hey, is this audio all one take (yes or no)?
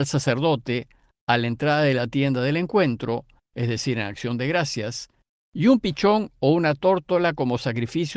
no